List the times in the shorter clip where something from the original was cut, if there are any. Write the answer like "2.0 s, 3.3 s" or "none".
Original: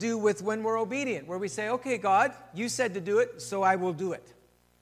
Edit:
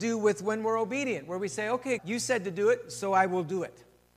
2.0 s